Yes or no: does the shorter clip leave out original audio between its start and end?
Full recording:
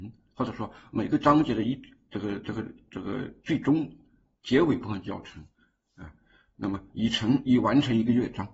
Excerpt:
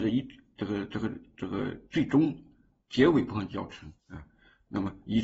yes